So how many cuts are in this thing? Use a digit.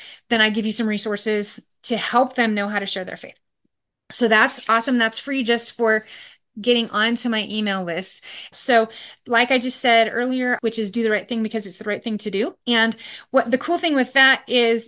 3